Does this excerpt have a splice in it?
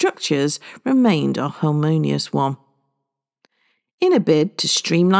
no; 0 cuts

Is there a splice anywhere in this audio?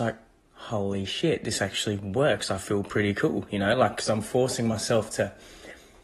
no; 0 cuts

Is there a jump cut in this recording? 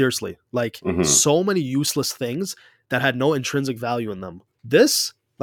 yes; 1 cut; at 4.5 s

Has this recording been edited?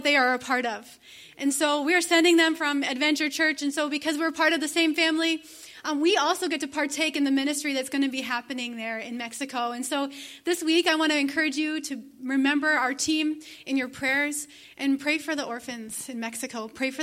no; 0 cuts

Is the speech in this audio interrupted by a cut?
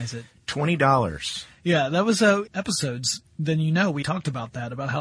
yes; 2 cuts; at 2.5 s, 4.0 s

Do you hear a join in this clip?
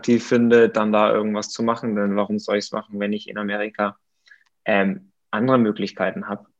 no; 0 cuts

